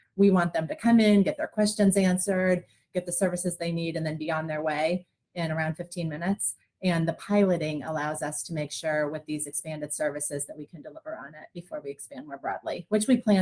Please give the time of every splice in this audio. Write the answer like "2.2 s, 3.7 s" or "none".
none

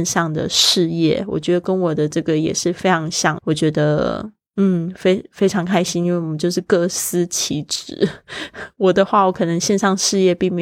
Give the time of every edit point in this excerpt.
3.4 s

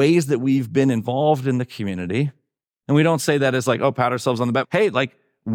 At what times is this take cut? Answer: 4.6 s

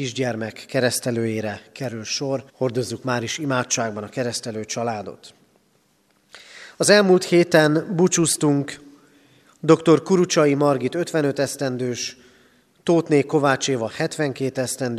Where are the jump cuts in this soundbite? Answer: 2.5 s

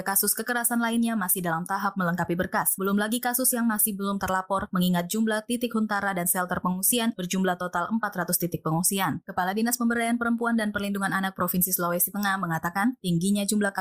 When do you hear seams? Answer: none

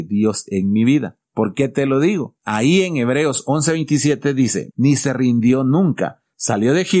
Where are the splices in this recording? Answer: 2.4 s, 4.7 s

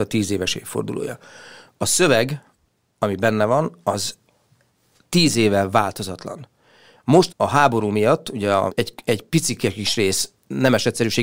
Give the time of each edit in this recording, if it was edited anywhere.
7.3 s, 8.7 s

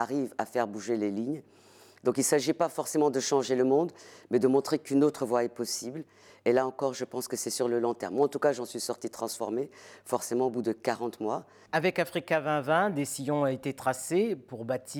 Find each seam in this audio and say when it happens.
11.7 s

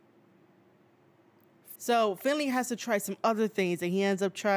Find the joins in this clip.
1.8 s

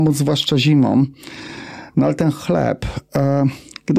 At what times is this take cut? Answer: none

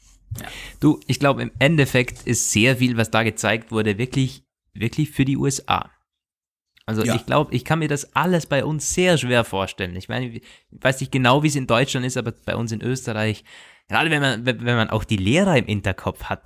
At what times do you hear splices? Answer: none

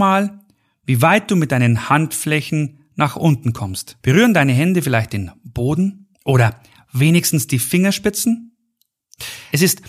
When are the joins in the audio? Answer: 4.0 s, 6.1 s

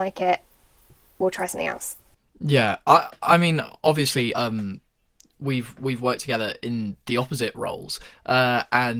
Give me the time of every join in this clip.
none

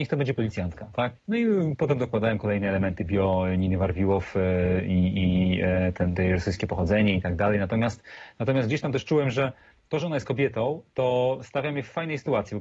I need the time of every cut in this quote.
1.2 s

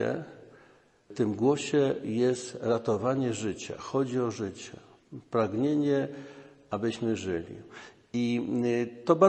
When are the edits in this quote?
none

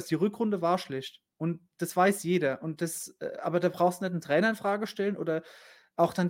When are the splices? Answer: none

